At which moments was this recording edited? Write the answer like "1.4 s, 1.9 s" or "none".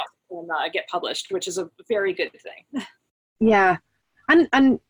none